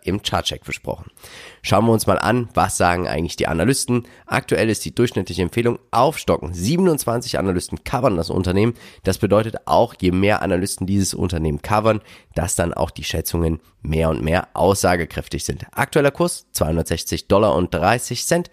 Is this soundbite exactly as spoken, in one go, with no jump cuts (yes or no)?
yes